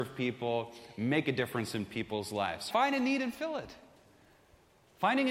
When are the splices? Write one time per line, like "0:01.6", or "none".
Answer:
0:02.7